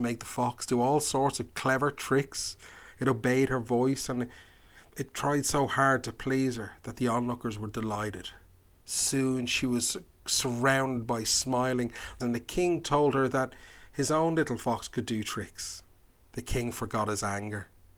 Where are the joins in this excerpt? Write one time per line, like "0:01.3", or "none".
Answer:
0:12.2
0:16.2